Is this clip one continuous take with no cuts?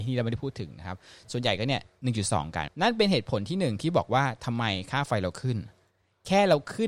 no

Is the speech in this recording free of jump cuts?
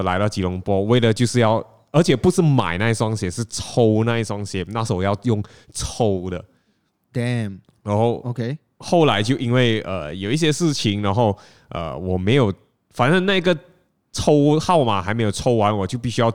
yes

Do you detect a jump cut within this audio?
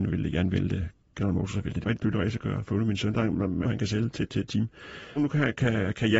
yes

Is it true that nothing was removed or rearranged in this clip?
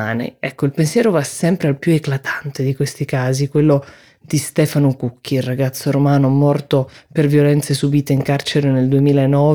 yes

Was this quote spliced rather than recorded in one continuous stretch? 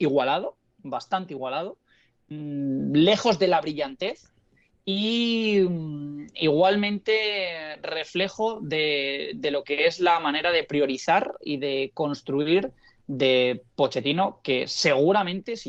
no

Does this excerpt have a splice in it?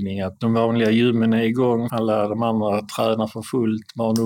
yes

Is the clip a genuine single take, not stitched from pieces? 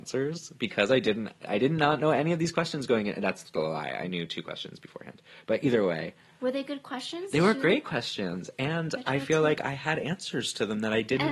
yes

